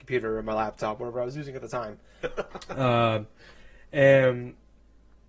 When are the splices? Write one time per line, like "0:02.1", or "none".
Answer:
0:02.2